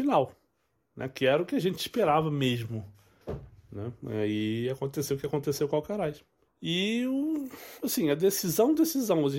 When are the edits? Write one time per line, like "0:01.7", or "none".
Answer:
0:06.4